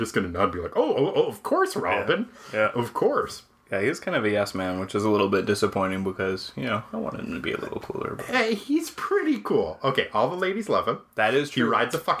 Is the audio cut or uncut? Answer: uncut